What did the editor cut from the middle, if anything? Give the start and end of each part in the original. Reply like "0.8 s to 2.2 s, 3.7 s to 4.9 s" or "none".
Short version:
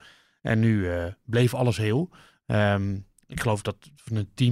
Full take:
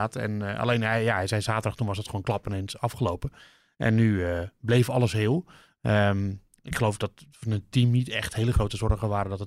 none